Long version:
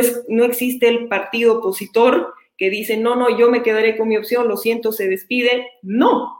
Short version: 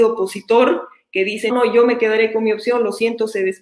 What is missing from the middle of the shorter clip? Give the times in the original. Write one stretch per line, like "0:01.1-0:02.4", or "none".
0:03.0-0:03.1